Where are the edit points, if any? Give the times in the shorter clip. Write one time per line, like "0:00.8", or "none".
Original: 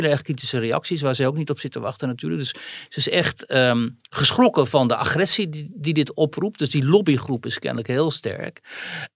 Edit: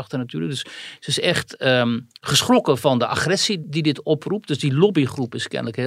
0:03.6